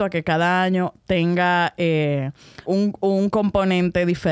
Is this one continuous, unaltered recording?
no; 1 cut; at 2.6 s

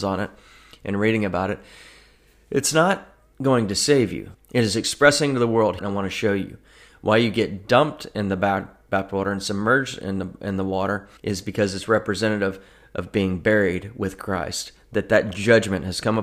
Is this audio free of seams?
no; 3 cuts; at 4.3 s, 5.8 s, 11.2 s

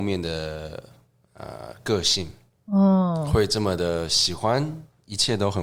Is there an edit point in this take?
no; 0 cuts

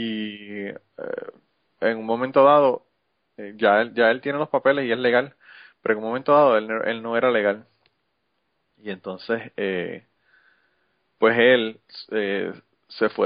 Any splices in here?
no; 0 cuts

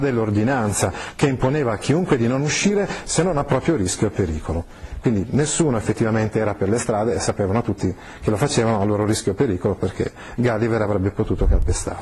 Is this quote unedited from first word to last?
yes; 0 cuts

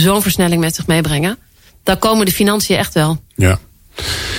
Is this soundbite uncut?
yes; 0 cuts

